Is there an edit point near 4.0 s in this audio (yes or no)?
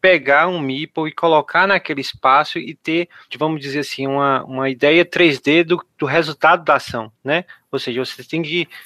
no